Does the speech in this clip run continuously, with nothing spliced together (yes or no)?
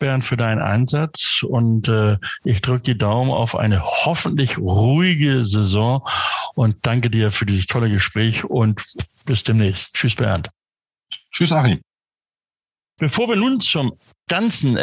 yes